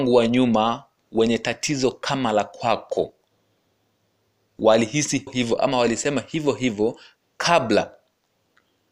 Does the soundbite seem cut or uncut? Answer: cut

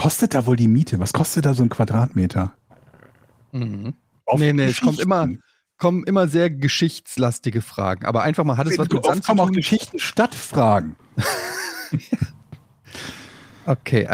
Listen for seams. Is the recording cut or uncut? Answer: cut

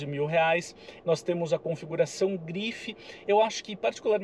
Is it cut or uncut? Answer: cut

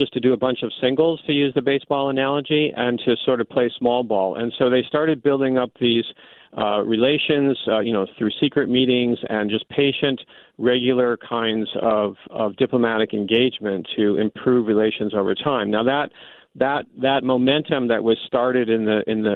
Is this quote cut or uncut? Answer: uncut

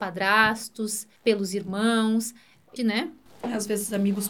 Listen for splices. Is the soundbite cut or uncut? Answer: cut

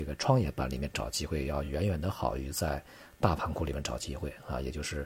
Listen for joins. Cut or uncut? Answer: uncut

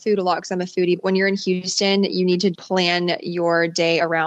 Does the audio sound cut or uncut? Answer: cut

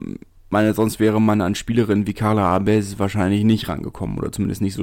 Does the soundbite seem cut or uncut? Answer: uncut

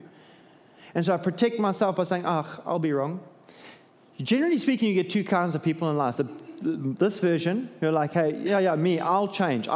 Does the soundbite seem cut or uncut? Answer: uncut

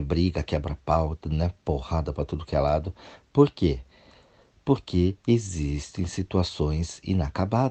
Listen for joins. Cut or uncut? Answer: uncut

